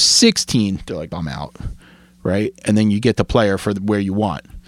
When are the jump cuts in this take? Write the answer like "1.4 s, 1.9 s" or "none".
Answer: 1.1 s